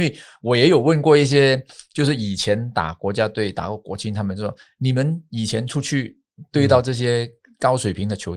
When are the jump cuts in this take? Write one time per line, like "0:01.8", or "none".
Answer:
none